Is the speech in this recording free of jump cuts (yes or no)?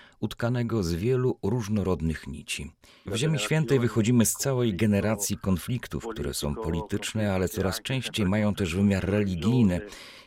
no